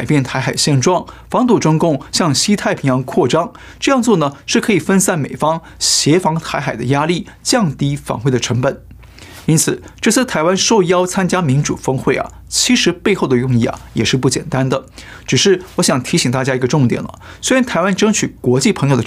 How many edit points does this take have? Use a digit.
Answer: 0